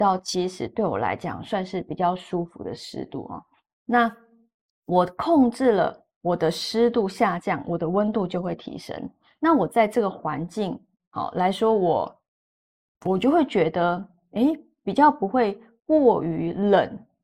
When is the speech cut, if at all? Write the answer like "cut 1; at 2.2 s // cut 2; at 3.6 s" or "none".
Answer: none